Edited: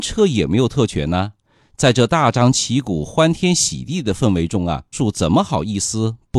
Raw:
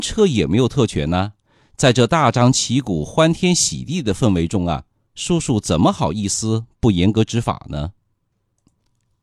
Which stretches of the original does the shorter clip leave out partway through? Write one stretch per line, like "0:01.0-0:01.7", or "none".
0:04.9-0:05.4